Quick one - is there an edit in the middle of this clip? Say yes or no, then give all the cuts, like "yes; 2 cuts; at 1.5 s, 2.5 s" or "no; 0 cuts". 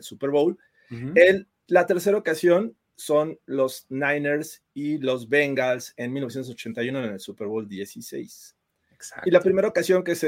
no; 0 cuts